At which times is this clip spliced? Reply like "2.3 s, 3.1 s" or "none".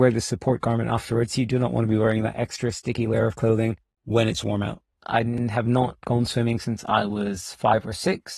5.0 s